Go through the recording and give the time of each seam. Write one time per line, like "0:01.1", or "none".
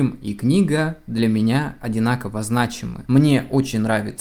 0:03.1